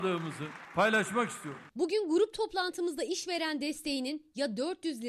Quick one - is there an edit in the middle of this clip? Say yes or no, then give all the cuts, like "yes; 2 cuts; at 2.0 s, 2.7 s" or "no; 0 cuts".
no; 0 cuts